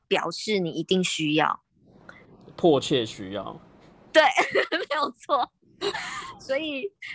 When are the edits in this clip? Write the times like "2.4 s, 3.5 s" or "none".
none

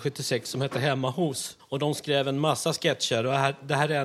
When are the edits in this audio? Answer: 1.6 s

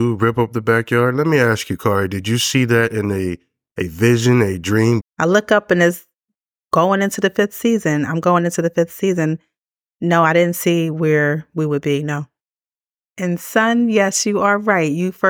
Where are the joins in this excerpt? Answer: 5.0 s

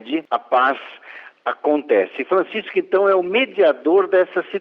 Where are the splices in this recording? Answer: none

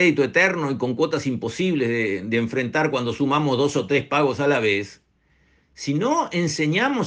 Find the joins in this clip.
none

